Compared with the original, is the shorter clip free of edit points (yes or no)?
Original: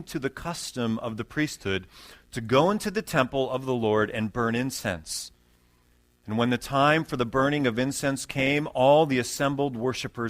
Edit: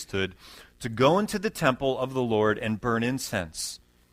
yes